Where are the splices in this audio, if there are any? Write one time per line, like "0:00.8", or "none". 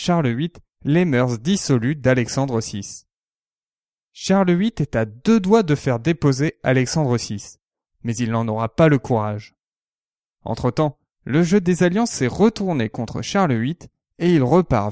0:10.3